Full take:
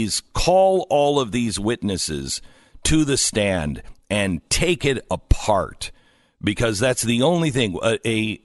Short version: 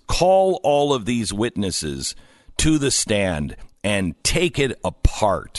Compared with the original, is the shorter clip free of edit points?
yes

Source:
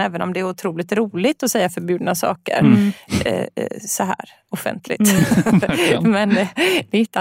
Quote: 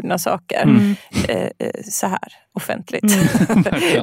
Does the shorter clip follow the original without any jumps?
yes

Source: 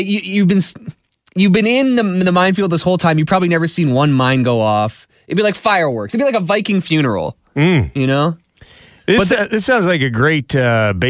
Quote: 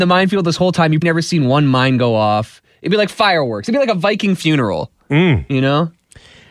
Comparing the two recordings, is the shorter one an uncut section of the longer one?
no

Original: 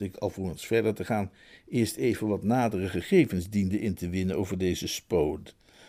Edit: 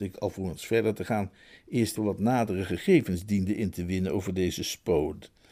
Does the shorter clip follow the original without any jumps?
no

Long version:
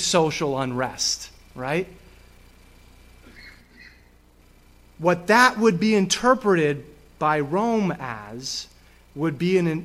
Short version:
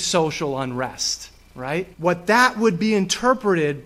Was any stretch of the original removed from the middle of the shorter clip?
yes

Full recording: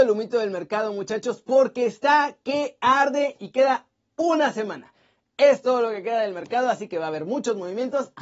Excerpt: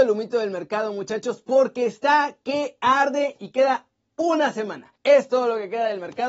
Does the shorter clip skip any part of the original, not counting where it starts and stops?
yes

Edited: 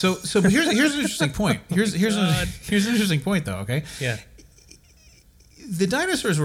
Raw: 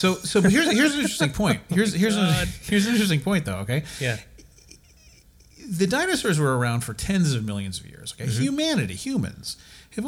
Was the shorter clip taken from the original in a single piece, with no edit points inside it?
yes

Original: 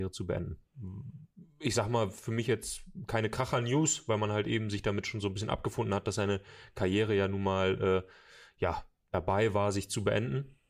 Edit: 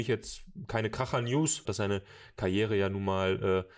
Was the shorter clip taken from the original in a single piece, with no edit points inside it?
no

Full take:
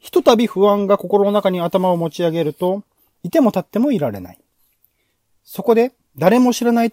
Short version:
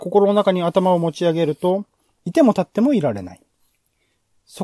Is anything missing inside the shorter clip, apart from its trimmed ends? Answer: no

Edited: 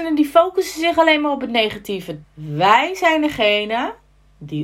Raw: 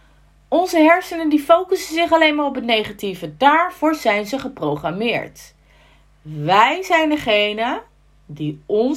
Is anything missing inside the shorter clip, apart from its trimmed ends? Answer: yes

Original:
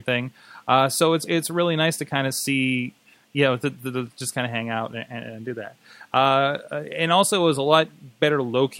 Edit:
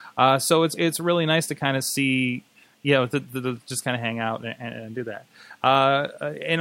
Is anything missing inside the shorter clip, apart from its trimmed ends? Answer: no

